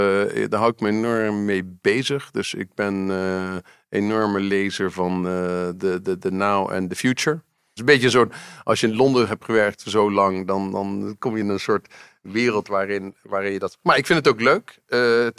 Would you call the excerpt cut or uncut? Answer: cut